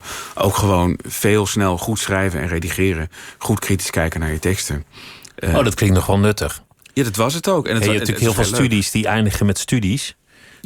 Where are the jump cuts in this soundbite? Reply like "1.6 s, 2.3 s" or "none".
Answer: none

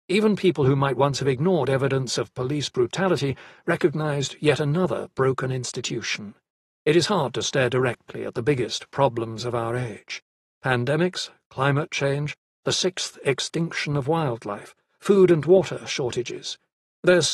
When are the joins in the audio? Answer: 6.6 s

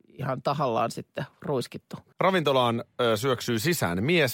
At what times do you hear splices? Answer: 2.1 s

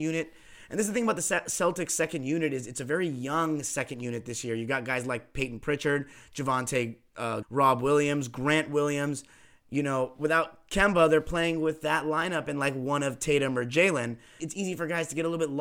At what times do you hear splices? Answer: 7.4 s, 14.4 s

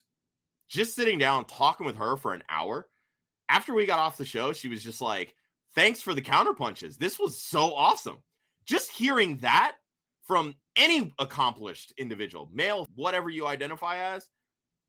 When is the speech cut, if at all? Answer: 12.9 s

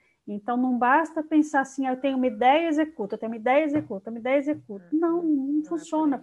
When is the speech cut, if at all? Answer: none

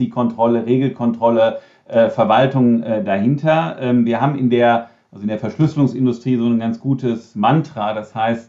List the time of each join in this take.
none

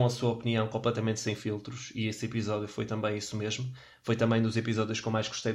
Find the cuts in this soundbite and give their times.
none

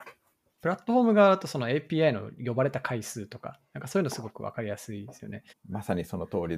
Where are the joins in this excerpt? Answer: 5.5 s

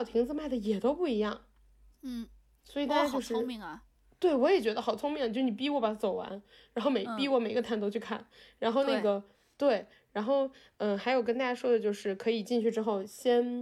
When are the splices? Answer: none

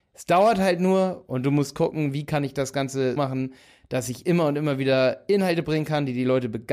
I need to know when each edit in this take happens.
3.2 s

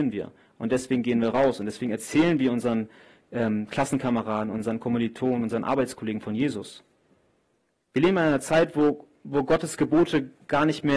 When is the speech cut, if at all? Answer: 7.8 s

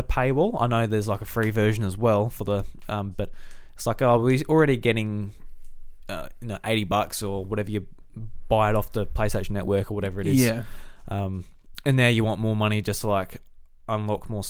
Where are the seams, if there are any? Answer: 3.1 s

